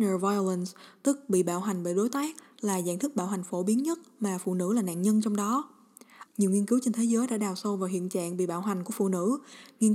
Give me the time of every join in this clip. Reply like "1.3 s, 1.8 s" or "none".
6.3 s